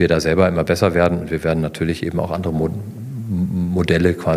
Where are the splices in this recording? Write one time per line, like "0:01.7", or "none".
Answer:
none